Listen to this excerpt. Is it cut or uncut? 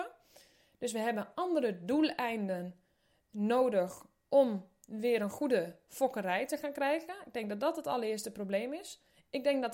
uncut